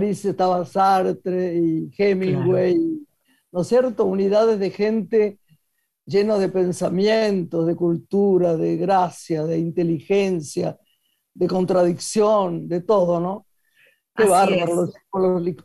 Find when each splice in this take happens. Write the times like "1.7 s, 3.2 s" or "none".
none